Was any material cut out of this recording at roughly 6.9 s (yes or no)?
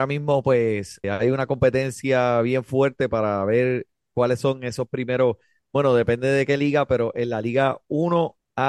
no